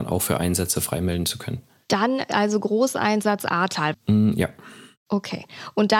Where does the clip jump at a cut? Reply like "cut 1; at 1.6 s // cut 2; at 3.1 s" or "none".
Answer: cut 1; at 3.9 s